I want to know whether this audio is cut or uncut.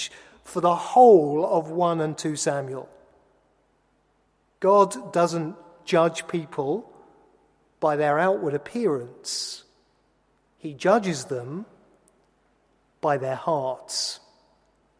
uncut